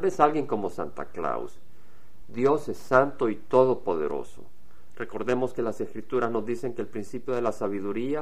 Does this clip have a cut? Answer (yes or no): yes